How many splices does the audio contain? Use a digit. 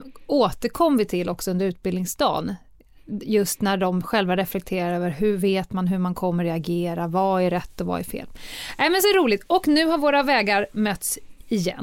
0